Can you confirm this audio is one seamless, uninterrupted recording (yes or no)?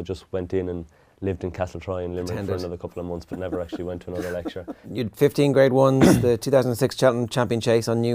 no